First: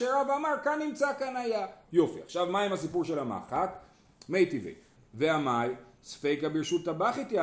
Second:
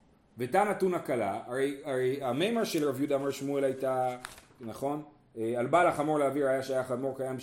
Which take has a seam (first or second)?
first